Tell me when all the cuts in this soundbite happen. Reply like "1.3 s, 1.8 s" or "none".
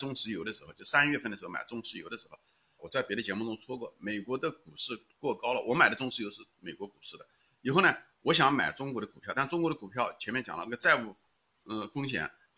2.8 s